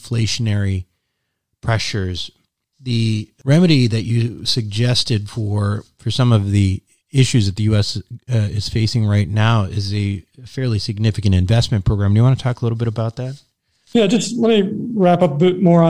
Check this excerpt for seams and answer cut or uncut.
uncut